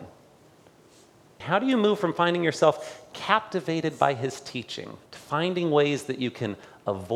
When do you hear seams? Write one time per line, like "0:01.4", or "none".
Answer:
0:01.4
0:05.1